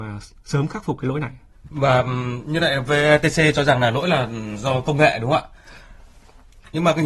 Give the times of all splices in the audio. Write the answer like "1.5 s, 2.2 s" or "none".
1.5 s